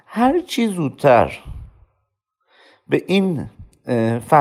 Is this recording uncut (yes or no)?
yes